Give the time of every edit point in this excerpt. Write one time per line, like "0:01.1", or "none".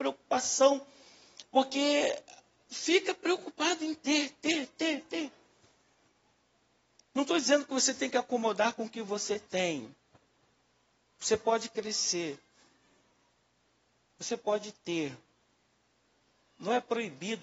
none

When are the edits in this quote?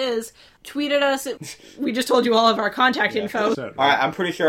0:01.4
0:03.5

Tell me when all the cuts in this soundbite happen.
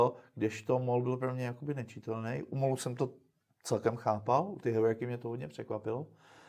none

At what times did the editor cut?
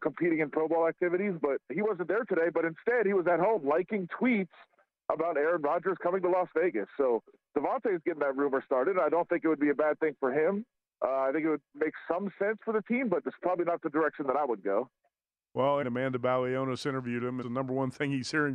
0:01.7
0:15.8
0:17.4

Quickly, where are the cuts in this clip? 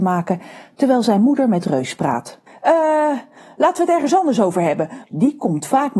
0:02.5
0:05.0

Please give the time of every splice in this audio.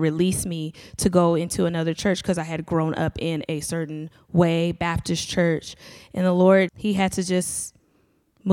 0:06.7

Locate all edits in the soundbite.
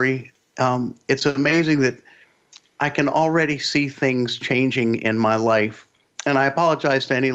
none

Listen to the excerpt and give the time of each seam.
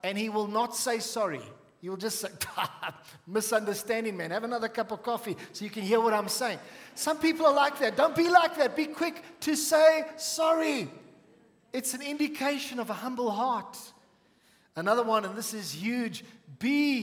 none

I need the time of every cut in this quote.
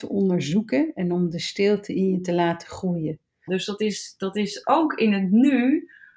0:03.5

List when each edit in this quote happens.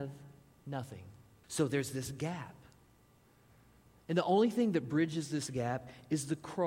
0:01.4

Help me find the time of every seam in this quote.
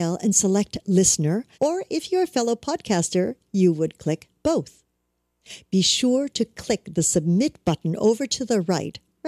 0:01.5

